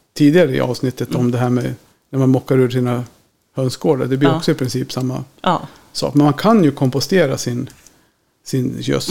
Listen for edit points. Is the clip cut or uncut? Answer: uncut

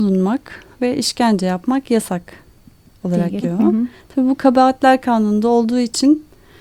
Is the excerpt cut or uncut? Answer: cut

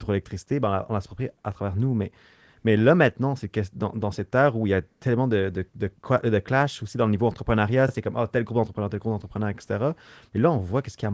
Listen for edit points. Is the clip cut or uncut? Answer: uncut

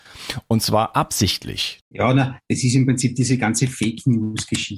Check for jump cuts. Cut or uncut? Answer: cut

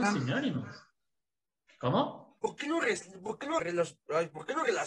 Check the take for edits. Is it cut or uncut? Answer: cut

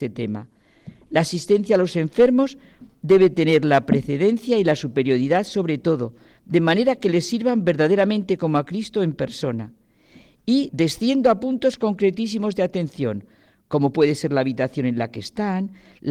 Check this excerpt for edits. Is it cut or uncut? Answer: cut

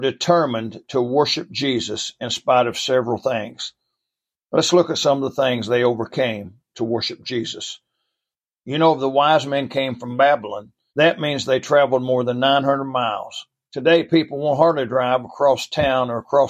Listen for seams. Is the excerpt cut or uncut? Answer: cut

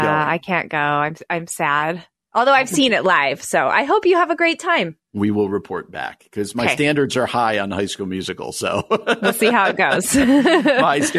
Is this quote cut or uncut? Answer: cut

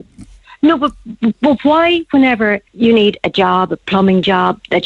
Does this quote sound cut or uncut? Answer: cut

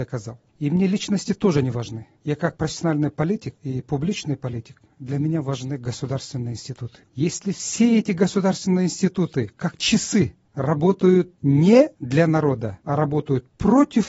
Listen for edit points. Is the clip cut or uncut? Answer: cut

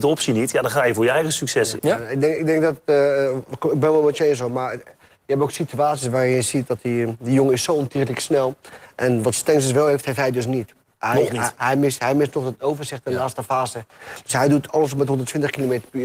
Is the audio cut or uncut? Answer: cut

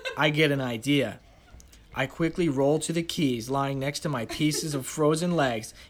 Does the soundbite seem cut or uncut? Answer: uncut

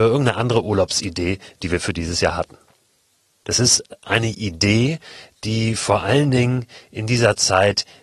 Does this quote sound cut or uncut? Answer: cut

